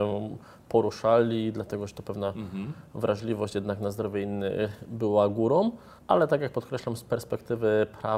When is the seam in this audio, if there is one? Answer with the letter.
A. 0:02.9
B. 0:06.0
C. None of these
B